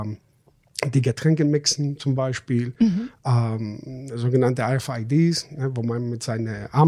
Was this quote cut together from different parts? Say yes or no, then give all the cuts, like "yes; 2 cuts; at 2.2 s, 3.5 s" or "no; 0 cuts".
no; 0 cuts